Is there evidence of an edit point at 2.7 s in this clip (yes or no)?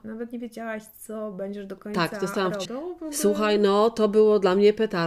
yes